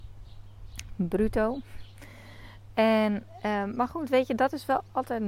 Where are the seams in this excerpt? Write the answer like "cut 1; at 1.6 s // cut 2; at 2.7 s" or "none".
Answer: none